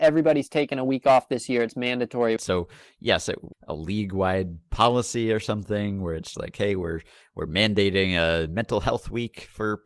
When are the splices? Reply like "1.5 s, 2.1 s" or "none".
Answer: 2.4 s, 3.5 s, 6.3 s